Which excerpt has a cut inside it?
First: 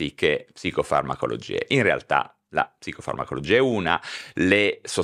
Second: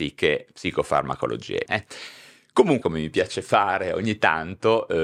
second; 2 cuts; at 1.7 s, 2.8 s

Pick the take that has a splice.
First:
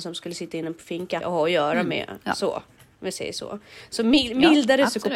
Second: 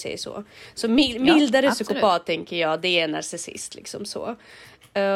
first; 1 cut; at 1.2 s

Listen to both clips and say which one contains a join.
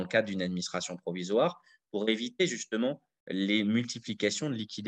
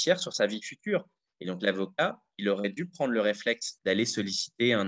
second; 2 cuts; at 1.3 s, 3.8 s

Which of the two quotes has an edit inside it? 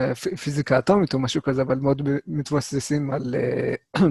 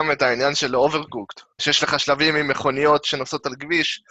second; 1 cut; at 1.6 s

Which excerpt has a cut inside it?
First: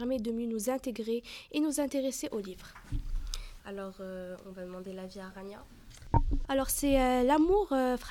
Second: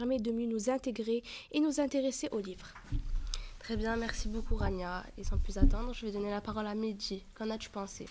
first; 2 cuts; at 3.6 s, 6.4 s

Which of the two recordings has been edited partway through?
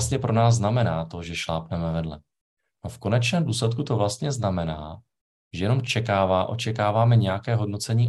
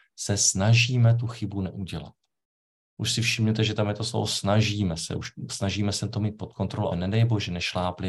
second; 1 cut; at 6.9 s

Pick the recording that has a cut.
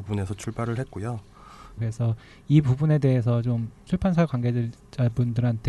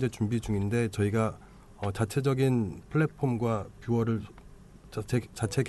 first; 1 cut; at 1.8 s

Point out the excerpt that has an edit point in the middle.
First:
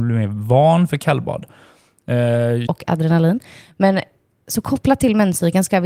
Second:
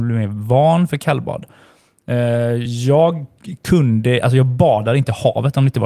first; 1 cut; at 2.7 s

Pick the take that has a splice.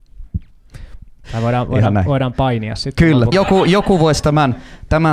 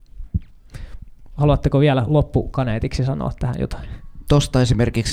first; 2 cuts; at 1.2 s, 3.3 s

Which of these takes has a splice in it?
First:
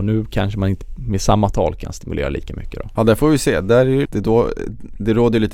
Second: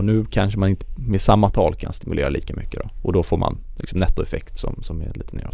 first; 2 cuts; at 3.0 s, 4.1 s

